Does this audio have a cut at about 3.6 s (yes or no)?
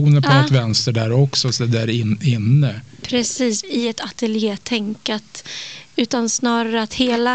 yes